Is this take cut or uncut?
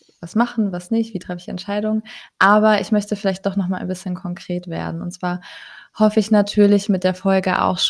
uncut